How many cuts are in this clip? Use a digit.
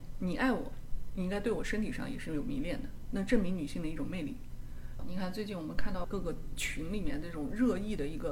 2